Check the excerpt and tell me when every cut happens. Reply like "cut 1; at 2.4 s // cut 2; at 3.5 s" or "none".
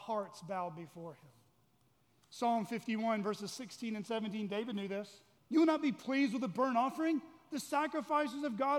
cut 1; at 5.4 s